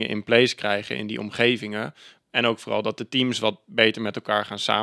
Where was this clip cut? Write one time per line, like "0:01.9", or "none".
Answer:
none

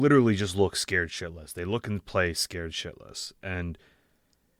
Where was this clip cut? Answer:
none

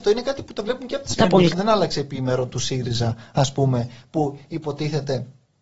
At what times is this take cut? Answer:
0:01.5

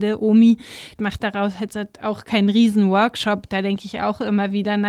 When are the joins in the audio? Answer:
0:01.0

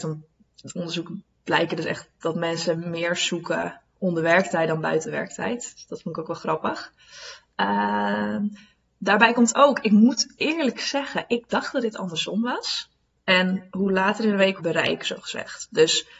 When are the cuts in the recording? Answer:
0:13.2
0:14.6

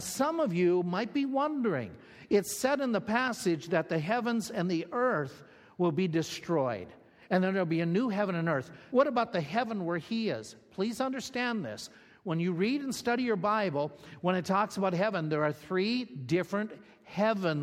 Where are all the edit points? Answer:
0:08.9

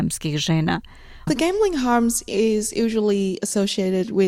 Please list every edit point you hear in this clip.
0:01.3

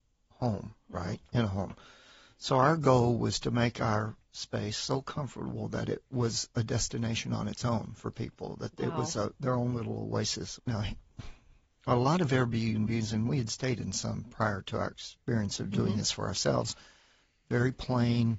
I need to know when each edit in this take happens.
0:10.6

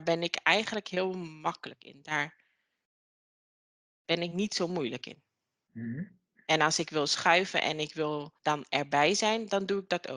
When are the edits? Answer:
0:05.7
0:08.4

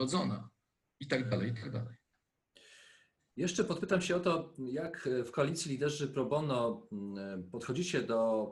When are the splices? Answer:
none

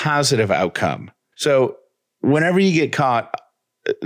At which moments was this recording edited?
0:01.3

